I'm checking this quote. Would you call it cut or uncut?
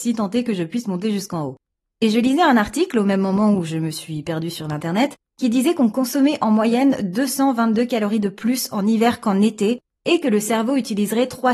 uncut